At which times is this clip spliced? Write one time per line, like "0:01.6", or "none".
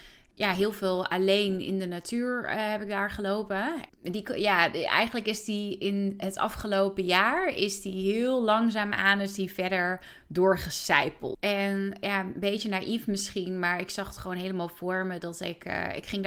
0:03.9
0:11.3